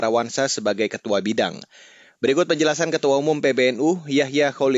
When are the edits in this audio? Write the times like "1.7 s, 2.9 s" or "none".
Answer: none